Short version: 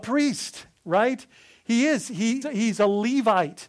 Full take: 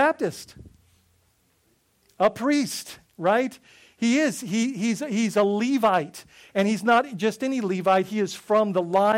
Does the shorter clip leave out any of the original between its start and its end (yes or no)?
yes